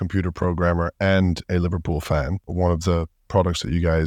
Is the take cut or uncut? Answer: cut